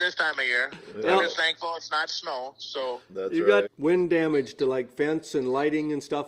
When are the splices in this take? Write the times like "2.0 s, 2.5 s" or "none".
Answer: 3.7 s